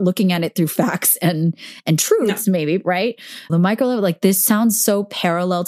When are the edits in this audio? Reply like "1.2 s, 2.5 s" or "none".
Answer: 3.5 s